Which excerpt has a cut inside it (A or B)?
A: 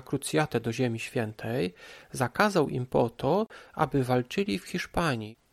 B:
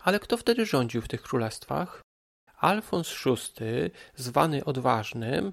B